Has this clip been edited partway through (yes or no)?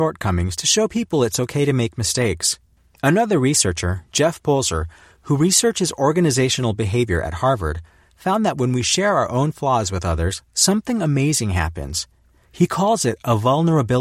no